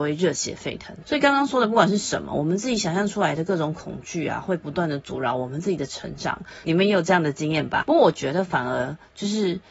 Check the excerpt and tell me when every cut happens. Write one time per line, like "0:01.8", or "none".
0:01.0
0:06.6
0:07.8